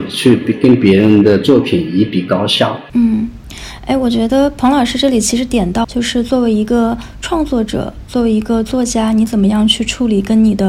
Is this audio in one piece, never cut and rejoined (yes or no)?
no